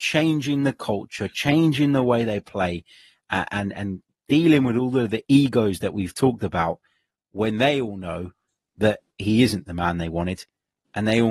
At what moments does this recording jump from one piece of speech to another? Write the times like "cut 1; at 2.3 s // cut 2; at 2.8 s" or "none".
none